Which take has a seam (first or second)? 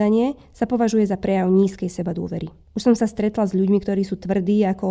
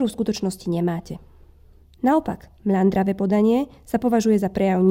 first